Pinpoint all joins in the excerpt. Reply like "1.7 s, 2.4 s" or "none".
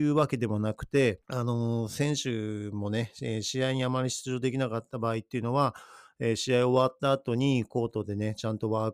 1.2 s